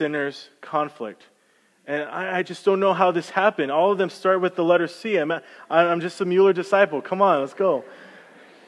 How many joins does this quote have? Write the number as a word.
zero